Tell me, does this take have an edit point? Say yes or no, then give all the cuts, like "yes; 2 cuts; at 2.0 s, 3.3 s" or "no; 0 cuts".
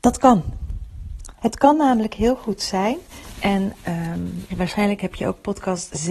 yes; 2 cuts; at 1.4 s, 4.5 s